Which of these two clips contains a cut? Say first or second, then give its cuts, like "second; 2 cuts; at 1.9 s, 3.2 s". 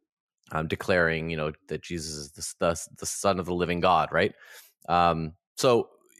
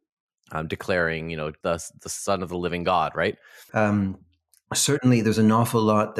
second; 2 cuts; at 1.6 s, 3.7 s